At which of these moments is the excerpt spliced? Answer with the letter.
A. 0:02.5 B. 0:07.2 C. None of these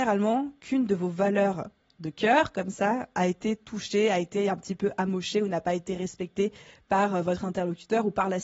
C